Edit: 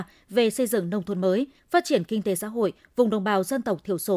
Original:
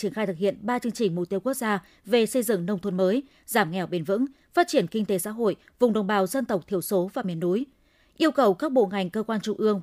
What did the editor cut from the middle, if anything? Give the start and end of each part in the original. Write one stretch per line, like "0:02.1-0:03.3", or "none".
0:03.3-0:04.4